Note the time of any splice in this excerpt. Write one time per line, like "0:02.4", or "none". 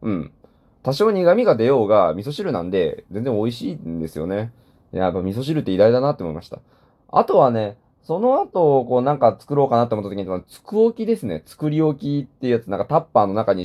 none